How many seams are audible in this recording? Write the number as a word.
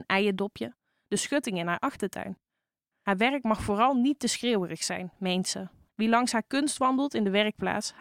one